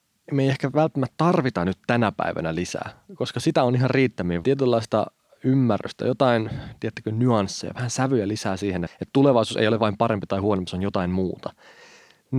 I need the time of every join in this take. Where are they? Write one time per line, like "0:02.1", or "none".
0:04.4
0:08.9